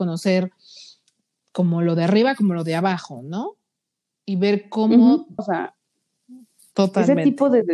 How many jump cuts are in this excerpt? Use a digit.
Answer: 1